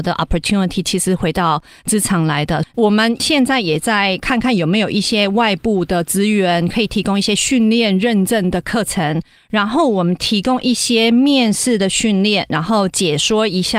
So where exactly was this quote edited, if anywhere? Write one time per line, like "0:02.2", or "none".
0:02.6
0:09.4